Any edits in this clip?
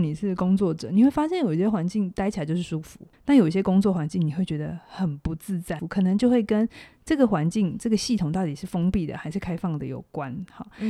yes; 2 cuts; at 3.1 s, 5.8 s

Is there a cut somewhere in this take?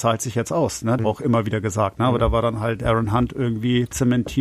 yes; 1 cut; at 1.0 s

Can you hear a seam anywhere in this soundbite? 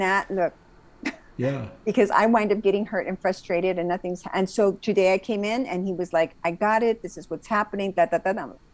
no; 0 cuts

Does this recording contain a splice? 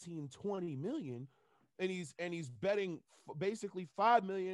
no; 0 cuts

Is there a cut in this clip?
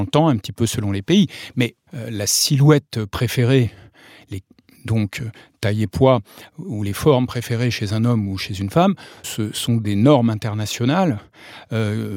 yes; 1 cut; at 9.2 s

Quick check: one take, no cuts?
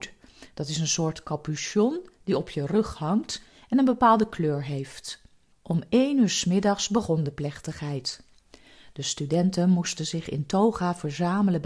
no; 1 cut; at 5.5 s

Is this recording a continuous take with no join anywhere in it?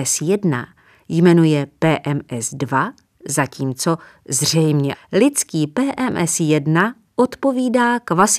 no; 1 cut; at 4.9 s

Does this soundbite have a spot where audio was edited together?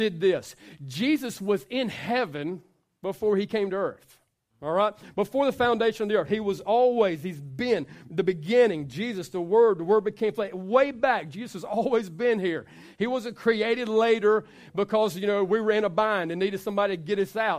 no; 0 cuts

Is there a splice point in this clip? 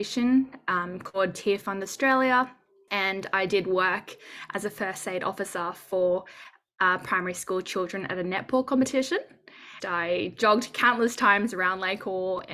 yes; 1 cut; at 9.8 s

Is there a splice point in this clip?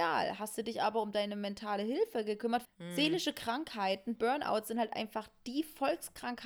yes; 2 cuts; at 2.6 s, 4.2 s

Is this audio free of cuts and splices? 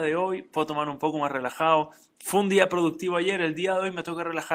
yes; 0 cuts

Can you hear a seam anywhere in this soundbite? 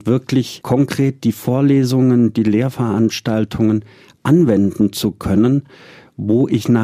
no; 0 cuts

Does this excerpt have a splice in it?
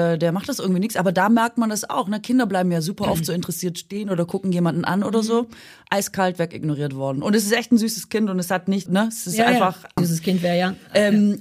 yes; 2 cuts; at 8.9 s, 10.0 s

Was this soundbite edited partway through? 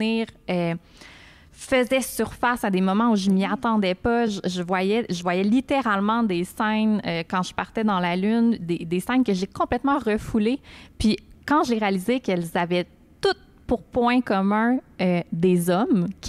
no; 0 cuts

